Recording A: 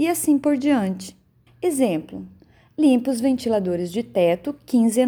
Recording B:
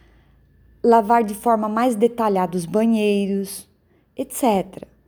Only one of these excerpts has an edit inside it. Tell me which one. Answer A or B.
A